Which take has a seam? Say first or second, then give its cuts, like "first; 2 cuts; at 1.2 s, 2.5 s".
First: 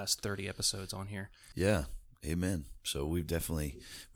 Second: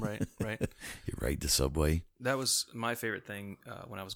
first; 1 cut; at 1.5 s